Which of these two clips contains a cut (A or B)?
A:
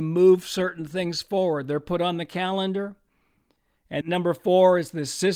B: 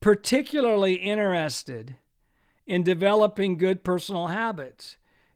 A